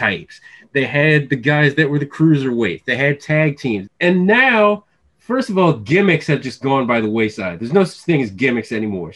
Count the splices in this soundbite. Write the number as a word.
one